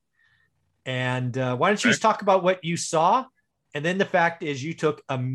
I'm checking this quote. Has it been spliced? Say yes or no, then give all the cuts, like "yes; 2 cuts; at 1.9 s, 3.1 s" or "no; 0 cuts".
no; 0 cuts